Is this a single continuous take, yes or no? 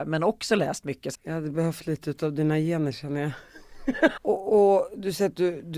no